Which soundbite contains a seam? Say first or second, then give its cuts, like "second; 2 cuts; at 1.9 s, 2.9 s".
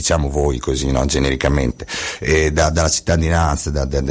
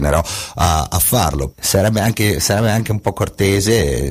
second; 1 cut; at 1.5 s